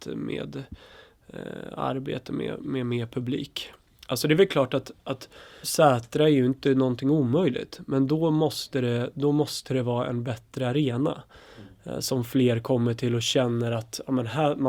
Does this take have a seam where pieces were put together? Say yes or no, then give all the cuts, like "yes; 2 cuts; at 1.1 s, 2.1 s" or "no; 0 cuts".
yes; 1 cut; at 5.6 s